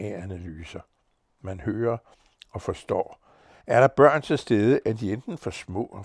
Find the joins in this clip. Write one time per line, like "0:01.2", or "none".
none